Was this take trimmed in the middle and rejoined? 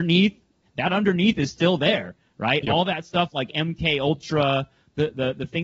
no; 0 cuts

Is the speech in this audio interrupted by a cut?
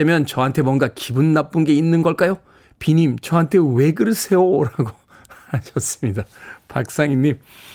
no; 0 cuts

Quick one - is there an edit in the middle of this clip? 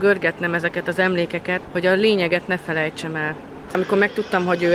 yes; 2 cuts; at 1.6 s, 3.7 s

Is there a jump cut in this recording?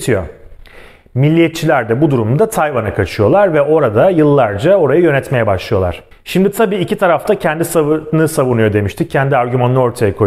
no; 0 cuts

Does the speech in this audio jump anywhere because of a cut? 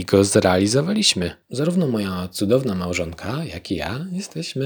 yes; 1 cut; at 1.4 s

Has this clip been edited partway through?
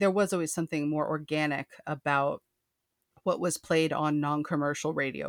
no; 0 cuts

